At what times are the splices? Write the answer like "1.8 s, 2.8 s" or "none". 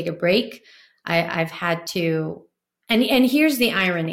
none